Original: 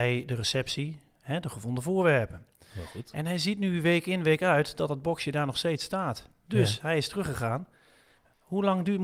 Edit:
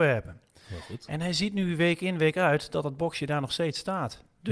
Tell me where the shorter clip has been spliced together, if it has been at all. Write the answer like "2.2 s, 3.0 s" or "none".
none